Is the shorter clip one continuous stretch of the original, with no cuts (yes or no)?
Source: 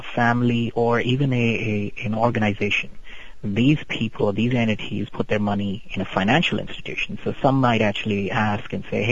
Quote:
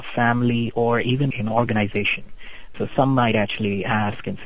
no